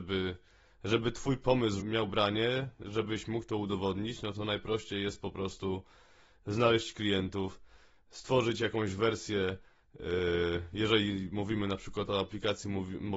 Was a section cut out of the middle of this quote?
yes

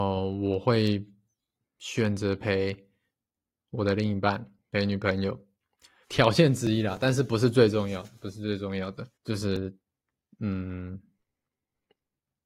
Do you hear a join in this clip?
yes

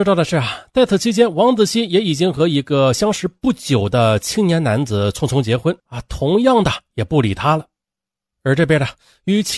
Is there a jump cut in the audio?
no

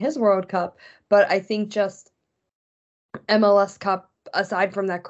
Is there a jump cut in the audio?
no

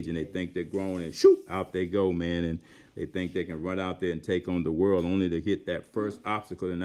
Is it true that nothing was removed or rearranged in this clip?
yes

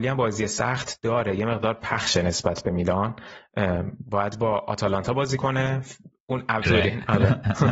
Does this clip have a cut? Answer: yes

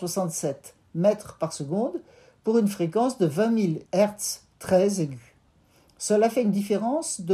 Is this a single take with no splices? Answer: no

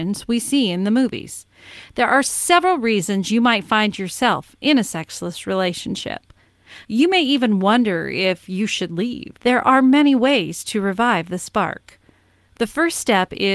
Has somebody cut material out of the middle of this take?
yes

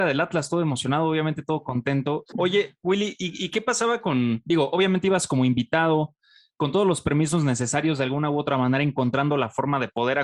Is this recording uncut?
no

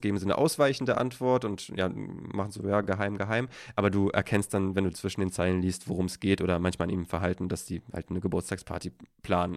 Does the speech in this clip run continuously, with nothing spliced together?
yes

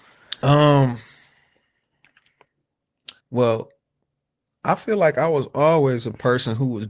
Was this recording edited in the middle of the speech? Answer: yes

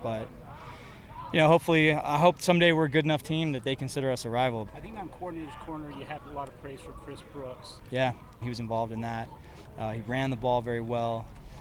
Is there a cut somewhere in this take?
yes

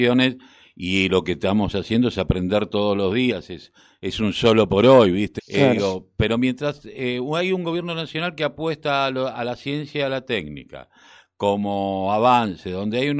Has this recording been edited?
yes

